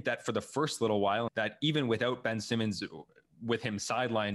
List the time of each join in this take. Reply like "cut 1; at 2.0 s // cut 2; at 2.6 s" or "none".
cut 1; at 1.3 s